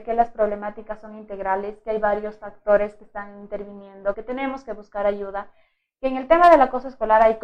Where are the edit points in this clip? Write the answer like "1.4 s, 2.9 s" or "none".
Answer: 4.1 s